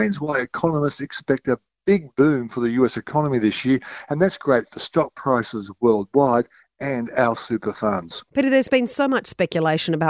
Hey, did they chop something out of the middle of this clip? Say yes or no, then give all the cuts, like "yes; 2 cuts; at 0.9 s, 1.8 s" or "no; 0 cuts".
yes; 1 cut; at 8.3 s